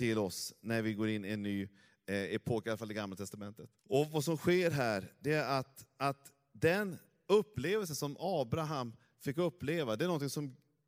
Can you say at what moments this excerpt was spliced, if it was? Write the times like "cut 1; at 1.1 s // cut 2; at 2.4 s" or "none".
cut 1; at 3.8 s